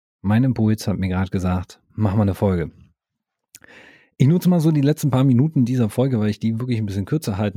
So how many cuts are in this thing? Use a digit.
1